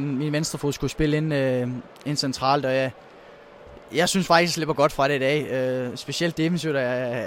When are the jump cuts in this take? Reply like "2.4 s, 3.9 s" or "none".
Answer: none